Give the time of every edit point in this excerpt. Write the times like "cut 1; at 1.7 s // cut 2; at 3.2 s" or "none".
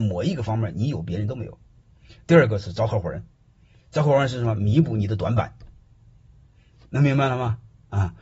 cut 1; at 6.9 s